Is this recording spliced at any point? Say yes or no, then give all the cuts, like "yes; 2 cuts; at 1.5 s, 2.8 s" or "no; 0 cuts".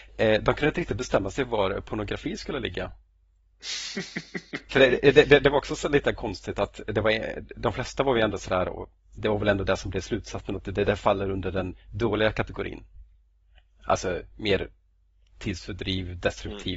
no; 0 cuts